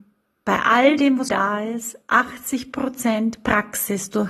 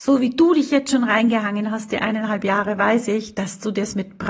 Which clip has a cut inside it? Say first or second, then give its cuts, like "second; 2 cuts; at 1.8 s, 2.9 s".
first; 1 cut; at 1.3 s